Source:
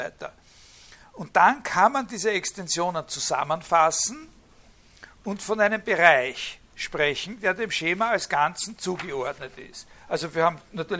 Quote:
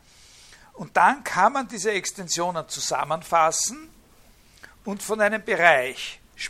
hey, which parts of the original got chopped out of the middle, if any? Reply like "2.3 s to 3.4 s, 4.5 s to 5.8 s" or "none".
none